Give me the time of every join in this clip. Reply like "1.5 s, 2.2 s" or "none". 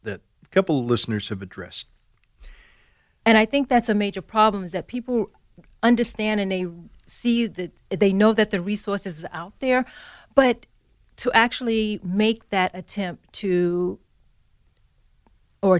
3.2 s